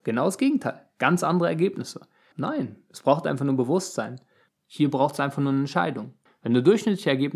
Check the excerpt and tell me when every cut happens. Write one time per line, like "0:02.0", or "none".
0:02.3
0:04.5
0:06.3